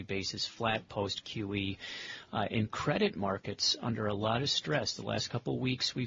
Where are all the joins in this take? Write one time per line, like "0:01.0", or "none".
none